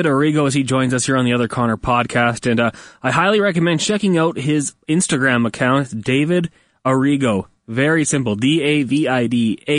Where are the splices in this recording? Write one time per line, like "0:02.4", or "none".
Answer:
none